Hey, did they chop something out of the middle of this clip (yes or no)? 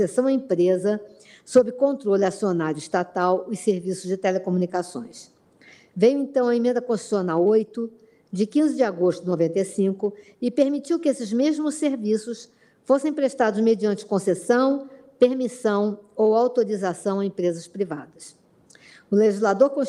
no